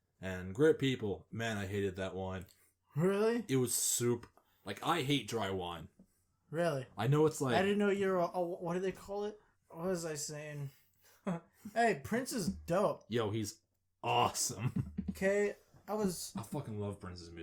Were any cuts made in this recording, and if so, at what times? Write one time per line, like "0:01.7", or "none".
0:09.5